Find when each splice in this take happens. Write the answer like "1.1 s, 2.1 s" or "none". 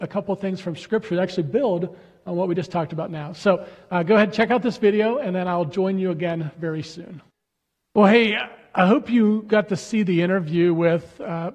none